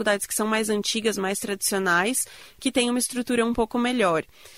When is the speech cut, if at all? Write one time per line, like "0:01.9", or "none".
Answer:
none

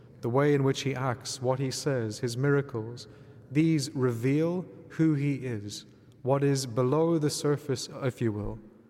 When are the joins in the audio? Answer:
none

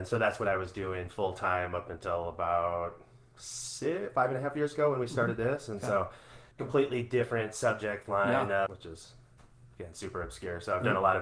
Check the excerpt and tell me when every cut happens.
0:06.5
0:08.7

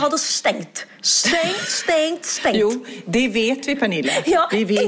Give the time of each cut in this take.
none

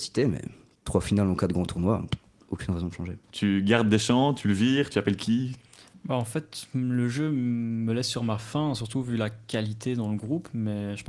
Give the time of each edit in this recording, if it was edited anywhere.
0:03.2

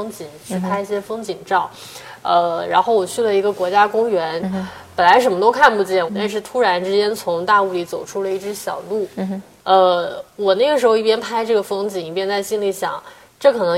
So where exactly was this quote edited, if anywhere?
0:04.4
0:06.1
0:09.6

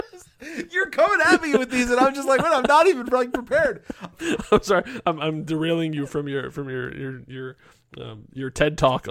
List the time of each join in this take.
none

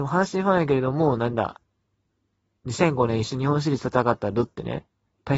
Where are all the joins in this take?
none

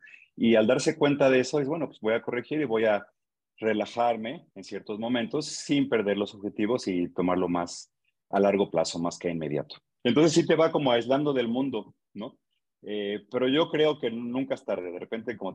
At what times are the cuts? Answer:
0:04.5
0:08.3
0:10.0

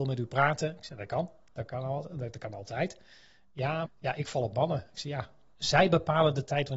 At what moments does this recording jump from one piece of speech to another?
0:03.9
0:05.5

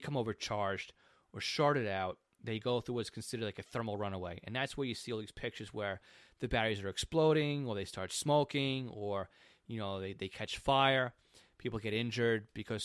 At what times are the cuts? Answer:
none

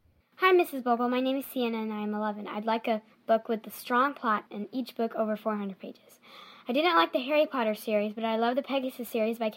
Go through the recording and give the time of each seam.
0:04.5

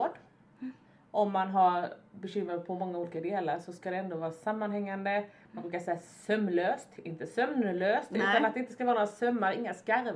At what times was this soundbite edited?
none

